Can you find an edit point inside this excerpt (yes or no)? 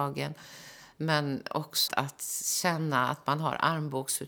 yes